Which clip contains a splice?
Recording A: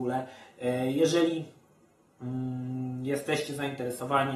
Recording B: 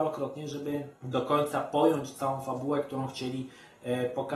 B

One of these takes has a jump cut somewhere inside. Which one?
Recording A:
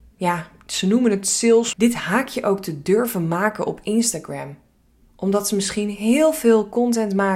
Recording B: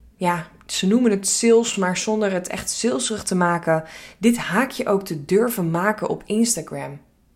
A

